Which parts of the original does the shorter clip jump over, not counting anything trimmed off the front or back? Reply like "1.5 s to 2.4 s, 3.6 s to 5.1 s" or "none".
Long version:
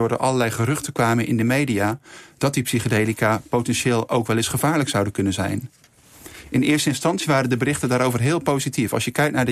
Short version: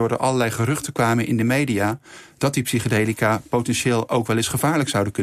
none